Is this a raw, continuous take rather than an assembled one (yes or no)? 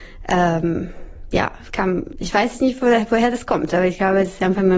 yes